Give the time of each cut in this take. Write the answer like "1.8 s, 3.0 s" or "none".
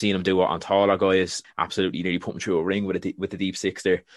1.4 s